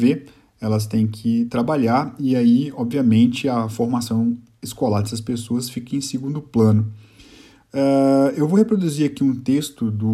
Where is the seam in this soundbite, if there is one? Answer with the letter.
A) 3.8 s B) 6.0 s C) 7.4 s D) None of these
D